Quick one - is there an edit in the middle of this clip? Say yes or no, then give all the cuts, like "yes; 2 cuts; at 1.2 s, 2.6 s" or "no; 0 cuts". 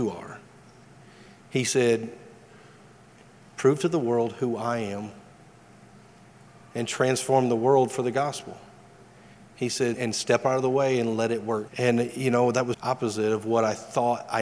yes; 3 cuts; at 9.9 s, 11.7 s, 12.7 s